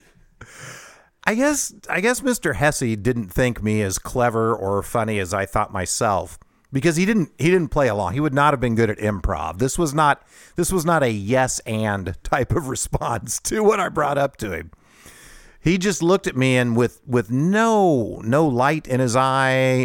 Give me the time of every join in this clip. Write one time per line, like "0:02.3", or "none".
none